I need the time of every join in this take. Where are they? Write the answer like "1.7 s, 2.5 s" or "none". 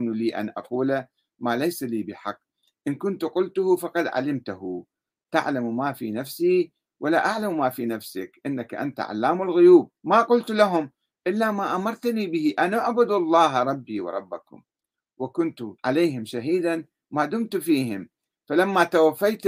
10.0 s, 15.8 s

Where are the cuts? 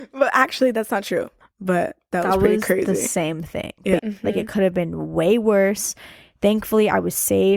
1.4 s, 4.0 s

